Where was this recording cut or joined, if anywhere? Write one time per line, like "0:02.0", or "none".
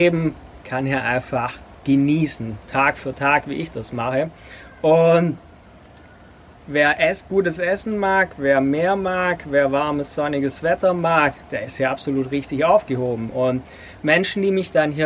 none